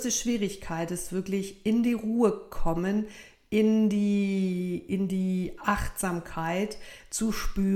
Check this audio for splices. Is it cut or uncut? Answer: uncut